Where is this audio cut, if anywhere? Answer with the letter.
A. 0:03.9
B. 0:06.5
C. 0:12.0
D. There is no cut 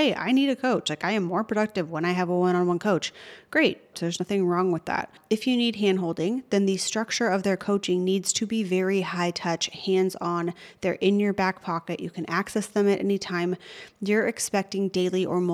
A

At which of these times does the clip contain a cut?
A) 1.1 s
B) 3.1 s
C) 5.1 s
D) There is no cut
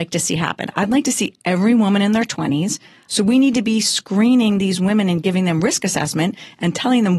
B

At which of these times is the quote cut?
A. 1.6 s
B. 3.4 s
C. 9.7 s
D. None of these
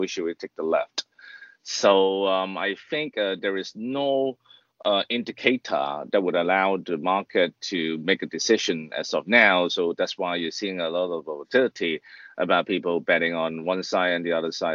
D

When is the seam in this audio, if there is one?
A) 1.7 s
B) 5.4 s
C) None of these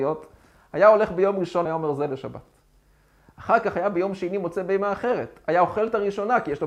A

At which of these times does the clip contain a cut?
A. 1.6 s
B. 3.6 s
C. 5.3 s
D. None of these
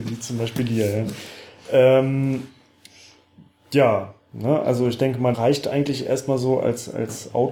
C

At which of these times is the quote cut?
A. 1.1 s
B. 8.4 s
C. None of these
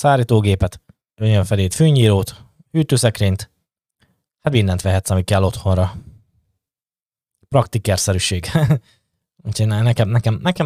A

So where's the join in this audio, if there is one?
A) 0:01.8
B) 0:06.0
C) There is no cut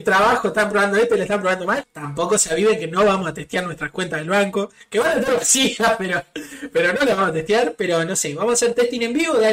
A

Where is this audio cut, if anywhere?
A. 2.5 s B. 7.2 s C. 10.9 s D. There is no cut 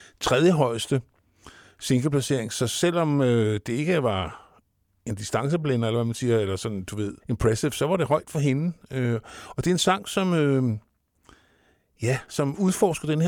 B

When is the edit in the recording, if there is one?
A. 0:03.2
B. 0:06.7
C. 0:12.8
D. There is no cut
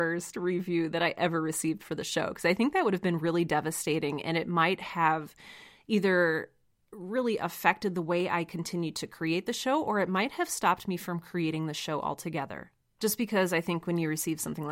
C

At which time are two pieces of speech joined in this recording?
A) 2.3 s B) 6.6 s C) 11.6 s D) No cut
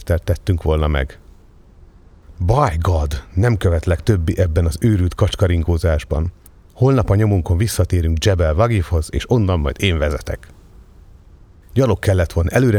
C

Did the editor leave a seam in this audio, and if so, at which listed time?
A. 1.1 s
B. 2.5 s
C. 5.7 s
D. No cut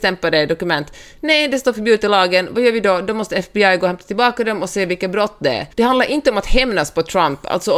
C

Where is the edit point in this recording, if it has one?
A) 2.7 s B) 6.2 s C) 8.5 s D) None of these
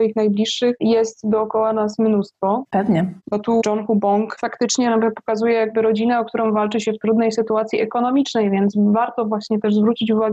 A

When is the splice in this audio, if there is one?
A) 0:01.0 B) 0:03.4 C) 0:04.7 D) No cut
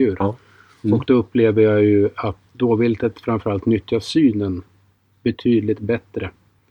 D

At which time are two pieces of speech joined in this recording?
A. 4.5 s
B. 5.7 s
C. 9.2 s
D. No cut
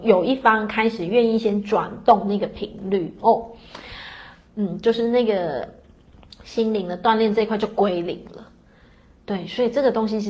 A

